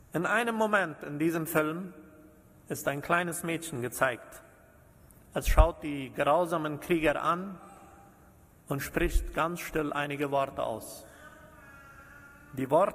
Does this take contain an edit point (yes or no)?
no